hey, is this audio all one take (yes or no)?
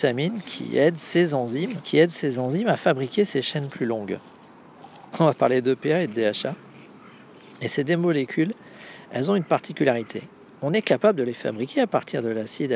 no